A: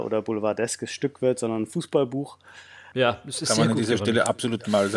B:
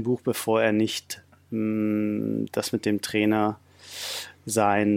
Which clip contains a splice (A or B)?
A